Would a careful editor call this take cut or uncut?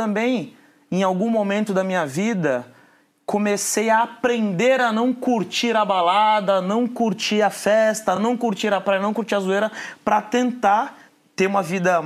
uncut